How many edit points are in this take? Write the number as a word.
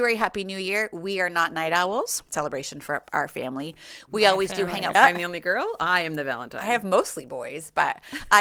two